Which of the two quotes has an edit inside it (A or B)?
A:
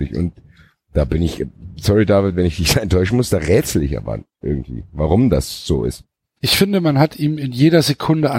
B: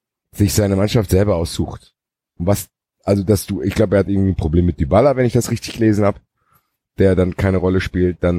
A